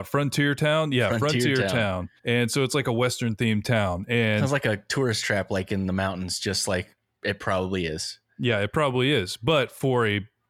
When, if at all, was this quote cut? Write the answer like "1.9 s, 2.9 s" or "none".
2.2 s